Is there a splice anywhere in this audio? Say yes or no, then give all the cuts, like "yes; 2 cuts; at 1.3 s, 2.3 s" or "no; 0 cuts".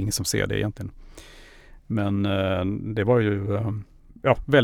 no; 0 cuts